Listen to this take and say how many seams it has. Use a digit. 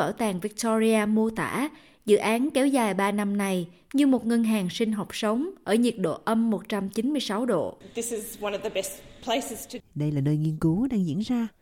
1